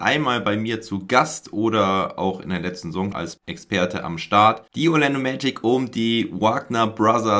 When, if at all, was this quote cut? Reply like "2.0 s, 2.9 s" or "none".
3.1 s, 4.7 s

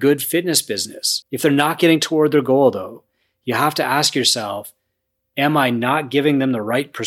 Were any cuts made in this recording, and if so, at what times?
1.2 s

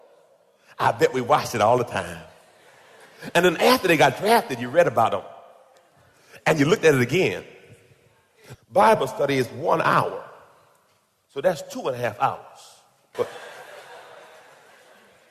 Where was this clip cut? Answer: 8.5 s, 13.1 s

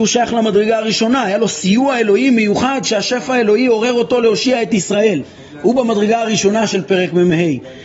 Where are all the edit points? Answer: none

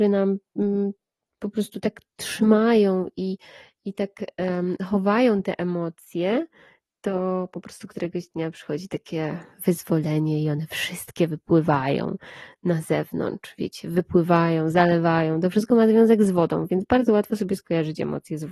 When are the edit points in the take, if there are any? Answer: none

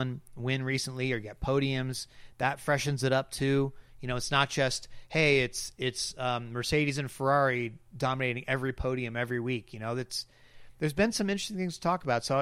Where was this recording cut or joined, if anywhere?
none

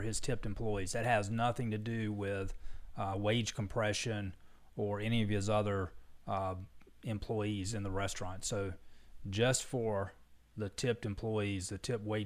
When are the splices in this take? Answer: none

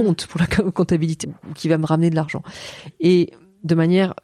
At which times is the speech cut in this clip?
1.2 s

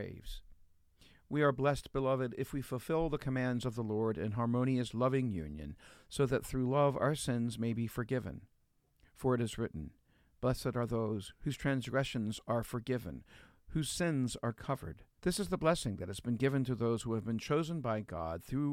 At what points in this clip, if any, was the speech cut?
15.2 s

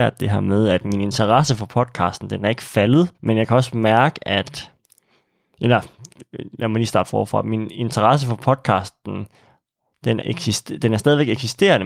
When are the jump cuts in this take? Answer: 3.1 s, 10.2 s

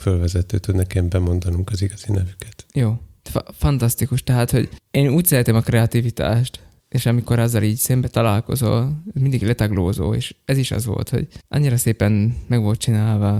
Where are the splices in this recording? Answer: none

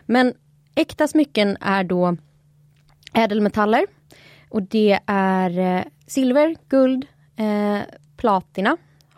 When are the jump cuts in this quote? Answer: 8.1 s

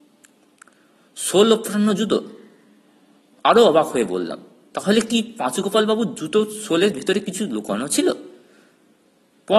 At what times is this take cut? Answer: 3.3 s

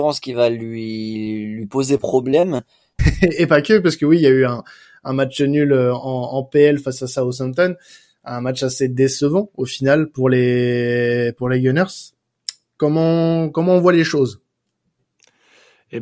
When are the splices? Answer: 3.0 s

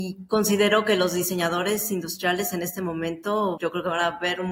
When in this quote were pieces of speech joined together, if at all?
3.6 s

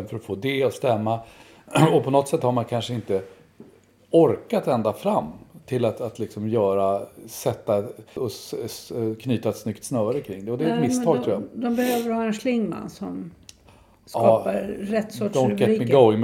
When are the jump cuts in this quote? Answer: 8.2 s

